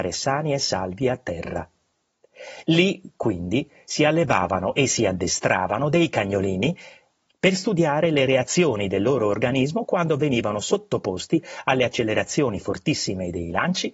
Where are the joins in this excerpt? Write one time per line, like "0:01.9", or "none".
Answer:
0:07.3